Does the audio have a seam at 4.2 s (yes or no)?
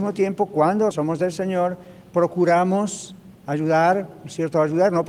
no